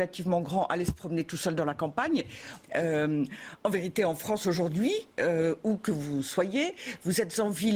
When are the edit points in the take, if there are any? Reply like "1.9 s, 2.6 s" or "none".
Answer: 2.6 s